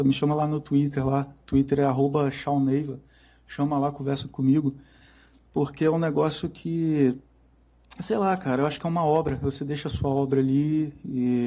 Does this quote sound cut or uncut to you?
uncut